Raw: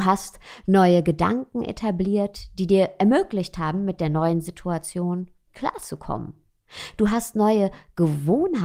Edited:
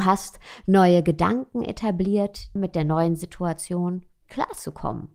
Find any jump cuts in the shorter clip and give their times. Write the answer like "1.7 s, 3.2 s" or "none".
2.6 s